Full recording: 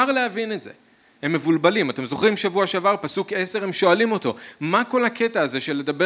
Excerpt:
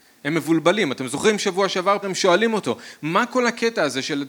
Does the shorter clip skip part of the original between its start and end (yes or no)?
yes